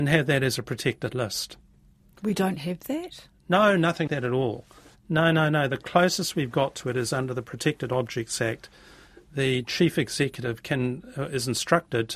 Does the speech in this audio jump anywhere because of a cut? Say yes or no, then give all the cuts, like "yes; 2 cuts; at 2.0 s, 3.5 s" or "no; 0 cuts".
yes; 1 cut; at 4.1 s